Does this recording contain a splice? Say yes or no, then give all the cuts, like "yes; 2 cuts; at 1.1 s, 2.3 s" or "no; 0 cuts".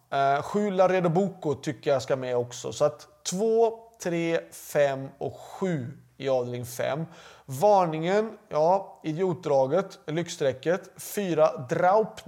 no; 0 cuts